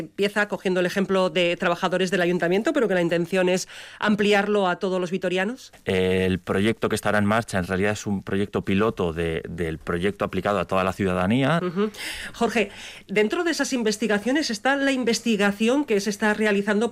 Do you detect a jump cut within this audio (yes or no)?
yes